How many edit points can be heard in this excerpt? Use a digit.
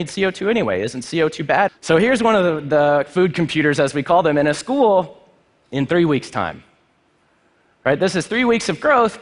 1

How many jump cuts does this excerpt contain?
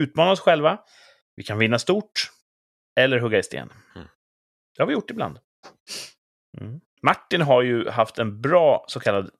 0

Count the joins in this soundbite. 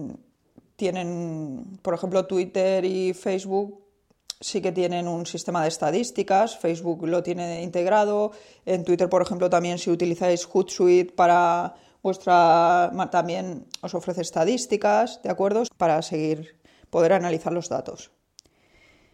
2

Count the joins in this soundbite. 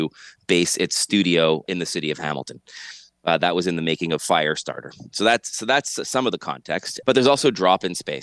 2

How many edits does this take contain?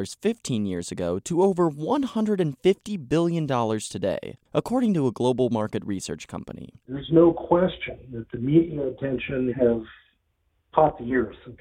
2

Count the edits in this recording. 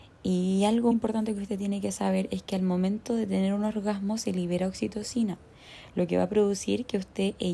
1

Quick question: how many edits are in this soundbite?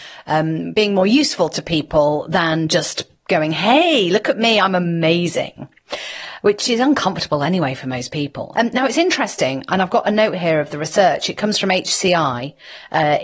1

